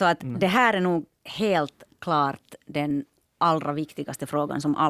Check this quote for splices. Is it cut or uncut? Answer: uncut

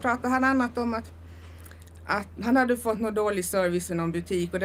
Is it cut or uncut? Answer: cut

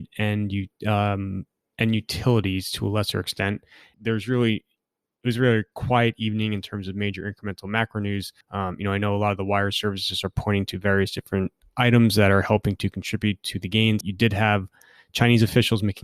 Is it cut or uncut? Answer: cut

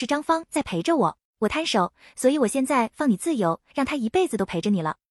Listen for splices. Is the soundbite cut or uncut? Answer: cut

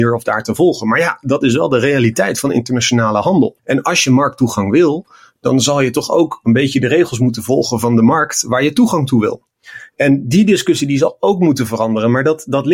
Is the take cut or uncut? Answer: cut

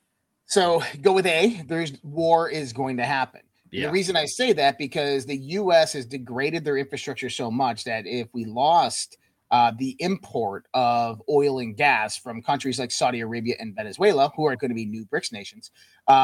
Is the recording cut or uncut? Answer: cut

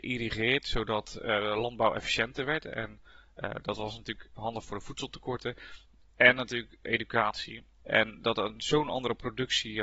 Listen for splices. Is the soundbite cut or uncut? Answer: cut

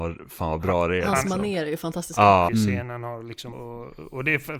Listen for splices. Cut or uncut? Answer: cut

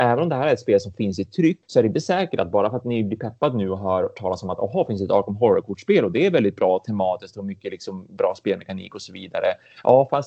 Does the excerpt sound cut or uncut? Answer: uncut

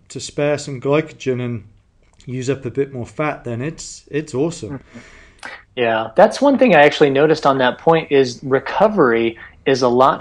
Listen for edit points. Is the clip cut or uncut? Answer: uncut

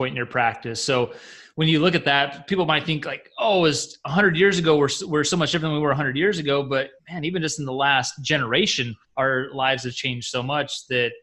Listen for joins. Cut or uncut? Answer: cut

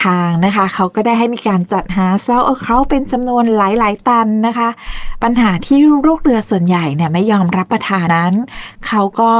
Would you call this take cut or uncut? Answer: cut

